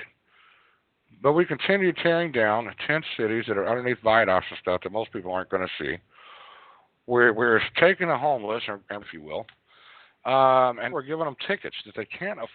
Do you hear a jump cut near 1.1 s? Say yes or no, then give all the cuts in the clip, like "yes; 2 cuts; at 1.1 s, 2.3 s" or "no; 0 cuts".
no; 2 cuts; at 9.0 s, 10.9 s